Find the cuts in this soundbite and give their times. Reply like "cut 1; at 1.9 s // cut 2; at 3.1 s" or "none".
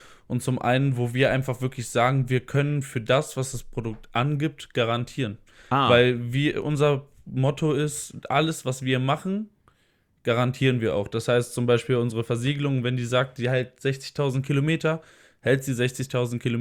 none